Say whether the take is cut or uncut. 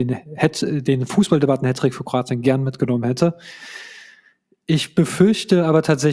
uncut